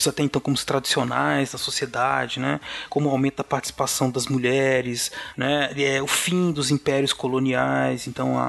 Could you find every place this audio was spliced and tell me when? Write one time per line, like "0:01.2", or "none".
0:05.3